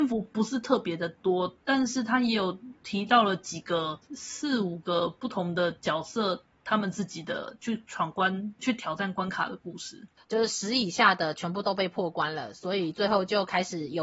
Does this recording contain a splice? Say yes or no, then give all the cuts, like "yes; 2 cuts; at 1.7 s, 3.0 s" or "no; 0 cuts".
yes; 2 cuts; at 8.6 s, 10.2 s